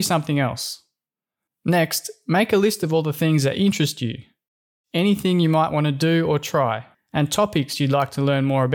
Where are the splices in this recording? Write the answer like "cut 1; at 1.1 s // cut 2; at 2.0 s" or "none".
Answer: cut 1; at 1.5 s // cut 2; at 6.9 s